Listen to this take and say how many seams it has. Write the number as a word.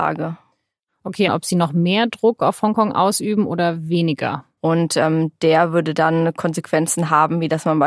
two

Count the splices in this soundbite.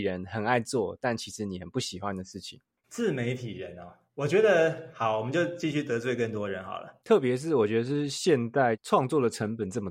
one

